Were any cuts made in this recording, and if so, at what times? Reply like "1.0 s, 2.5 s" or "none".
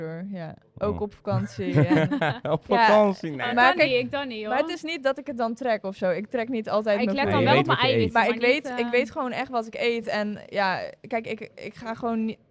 3.5 s